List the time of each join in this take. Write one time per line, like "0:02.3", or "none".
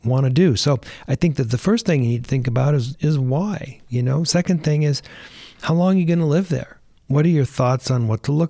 0:02.9
0:07.0